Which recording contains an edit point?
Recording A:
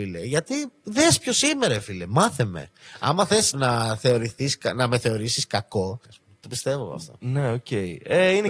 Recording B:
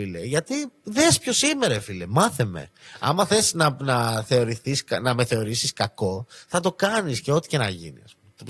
A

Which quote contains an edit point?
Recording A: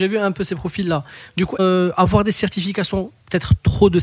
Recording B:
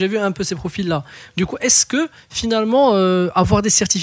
A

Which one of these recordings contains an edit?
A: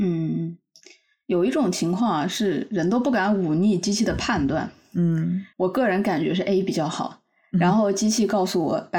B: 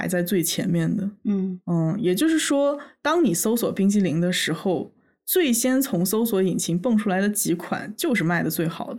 A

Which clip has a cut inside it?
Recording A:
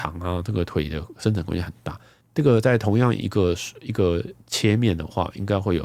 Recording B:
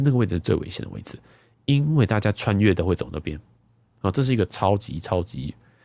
A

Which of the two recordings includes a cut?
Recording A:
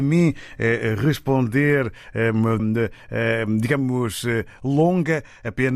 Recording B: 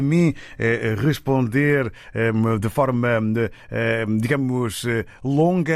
A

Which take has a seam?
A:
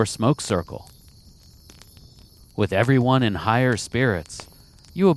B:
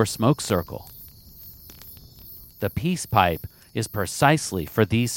B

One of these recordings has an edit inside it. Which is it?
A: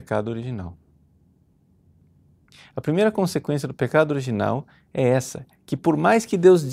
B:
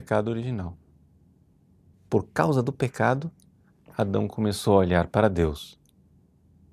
B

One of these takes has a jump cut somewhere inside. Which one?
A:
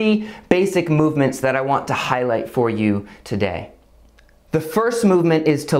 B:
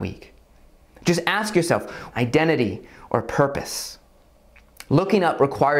B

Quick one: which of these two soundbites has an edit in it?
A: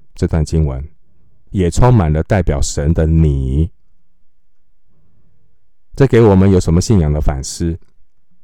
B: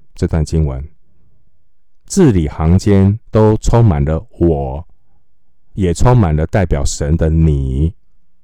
A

